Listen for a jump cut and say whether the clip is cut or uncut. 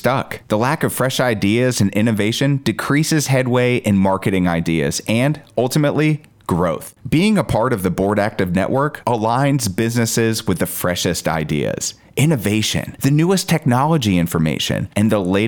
uncut